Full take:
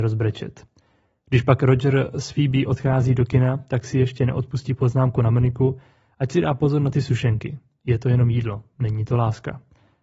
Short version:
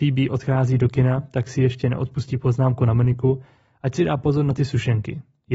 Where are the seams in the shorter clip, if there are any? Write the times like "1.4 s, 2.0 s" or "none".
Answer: none